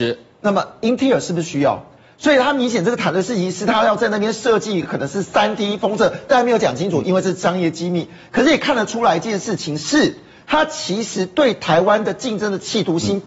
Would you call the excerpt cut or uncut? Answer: uncut